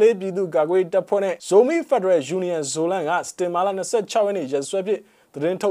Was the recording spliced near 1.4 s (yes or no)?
yes